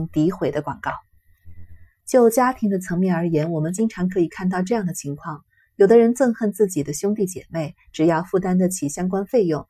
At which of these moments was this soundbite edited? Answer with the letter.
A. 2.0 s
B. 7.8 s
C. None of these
C